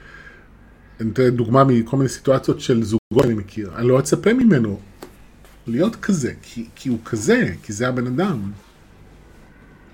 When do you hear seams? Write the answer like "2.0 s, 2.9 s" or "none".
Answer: none

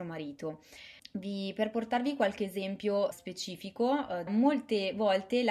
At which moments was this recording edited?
1.0 s, 3.1 s, 4.3 s

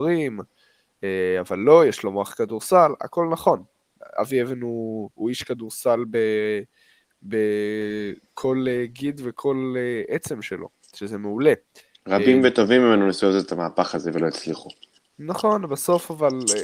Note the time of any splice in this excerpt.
none

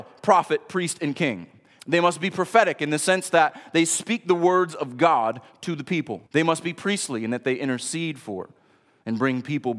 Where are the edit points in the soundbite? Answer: 1.8 s, 6.3 s

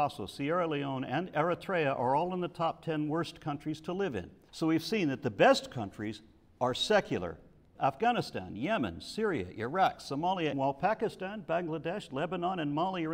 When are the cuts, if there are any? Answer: 4.5 s, 7.8 s, 10.5 s

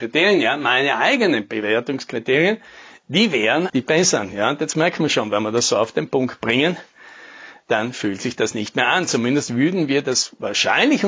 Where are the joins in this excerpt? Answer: 3.7 s

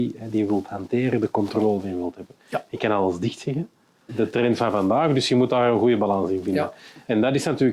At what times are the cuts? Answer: 4.1 s

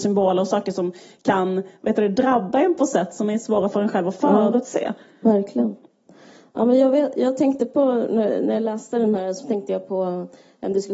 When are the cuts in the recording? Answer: none

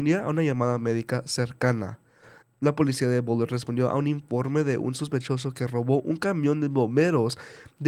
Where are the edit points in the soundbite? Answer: 2.4 s

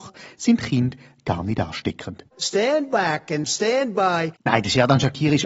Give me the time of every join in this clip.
none

